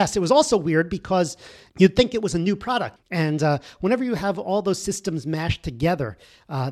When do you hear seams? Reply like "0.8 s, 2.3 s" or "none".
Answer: 1.7 s, 3.0 s